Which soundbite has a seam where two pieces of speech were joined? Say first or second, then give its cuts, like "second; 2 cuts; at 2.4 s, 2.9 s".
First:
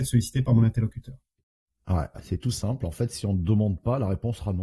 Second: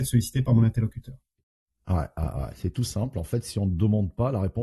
first; 1 cut; at 2.1 s